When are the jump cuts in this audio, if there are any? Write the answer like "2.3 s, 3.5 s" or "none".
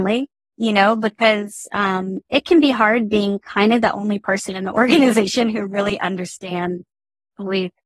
none